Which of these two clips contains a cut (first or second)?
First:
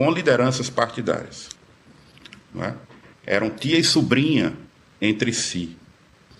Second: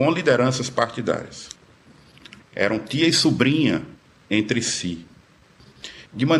second